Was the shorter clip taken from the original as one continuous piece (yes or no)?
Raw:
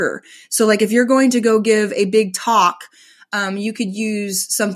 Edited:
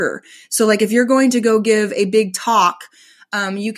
yes